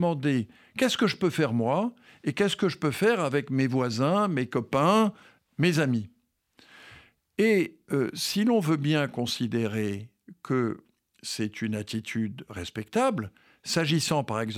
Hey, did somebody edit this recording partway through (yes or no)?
no